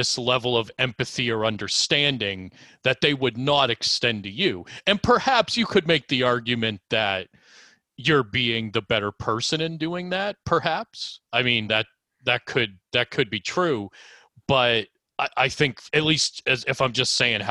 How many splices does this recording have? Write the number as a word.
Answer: zero